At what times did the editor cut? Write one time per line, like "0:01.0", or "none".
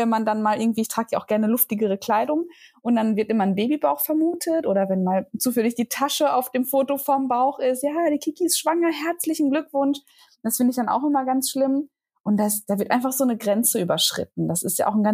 none